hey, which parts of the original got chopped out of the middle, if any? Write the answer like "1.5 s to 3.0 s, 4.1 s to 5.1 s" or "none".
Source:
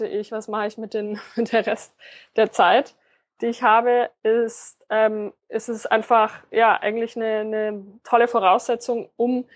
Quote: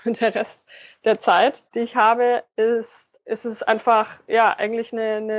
3.0 s to 3.3 s, 4.8 s to 5.4 s